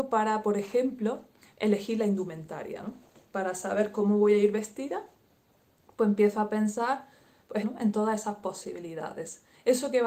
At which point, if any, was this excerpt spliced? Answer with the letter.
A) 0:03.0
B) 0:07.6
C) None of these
B